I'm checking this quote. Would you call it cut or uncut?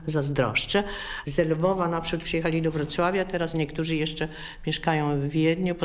cut